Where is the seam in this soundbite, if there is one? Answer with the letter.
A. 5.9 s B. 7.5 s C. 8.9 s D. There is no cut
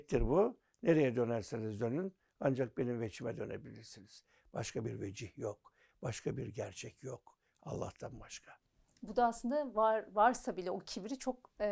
A